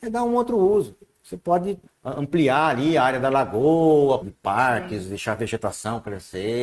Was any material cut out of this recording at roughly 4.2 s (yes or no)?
yes